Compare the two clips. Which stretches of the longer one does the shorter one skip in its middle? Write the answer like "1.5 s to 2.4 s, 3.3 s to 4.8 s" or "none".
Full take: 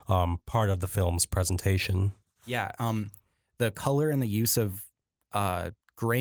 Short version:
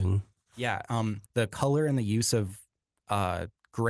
3.2 s to 3.5 s